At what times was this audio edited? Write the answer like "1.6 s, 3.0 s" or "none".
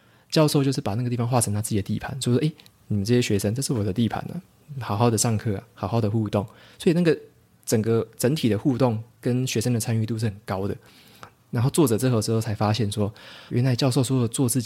13.5 s